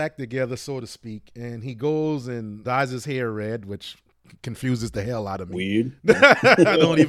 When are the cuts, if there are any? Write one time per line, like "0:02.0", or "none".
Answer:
0:02.6